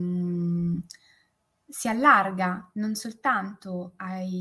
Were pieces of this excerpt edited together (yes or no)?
no